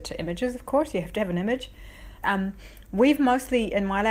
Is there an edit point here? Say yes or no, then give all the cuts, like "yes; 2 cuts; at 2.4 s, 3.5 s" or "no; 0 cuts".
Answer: yes; 1 cut; at 2.2 s